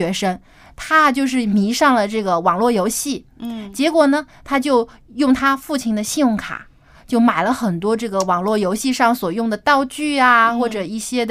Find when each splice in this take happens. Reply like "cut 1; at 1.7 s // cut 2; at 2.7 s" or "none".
none